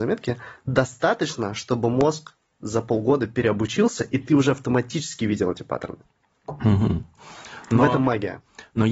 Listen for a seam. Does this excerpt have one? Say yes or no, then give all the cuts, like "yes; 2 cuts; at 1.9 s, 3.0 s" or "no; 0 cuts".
no; 0 cuts